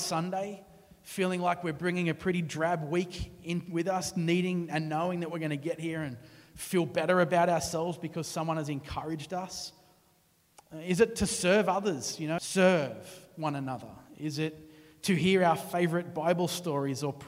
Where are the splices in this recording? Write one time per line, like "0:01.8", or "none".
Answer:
0:12.4